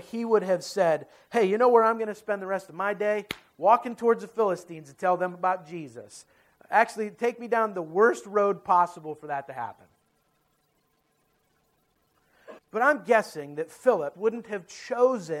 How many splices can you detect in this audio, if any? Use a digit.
2